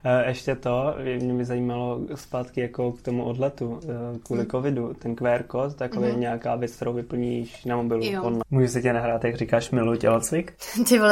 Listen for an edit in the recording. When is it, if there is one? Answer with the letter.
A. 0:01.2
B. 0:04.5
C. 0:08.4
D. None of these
C